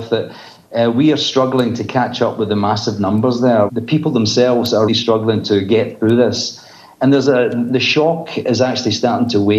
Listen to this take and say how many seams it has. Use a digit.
2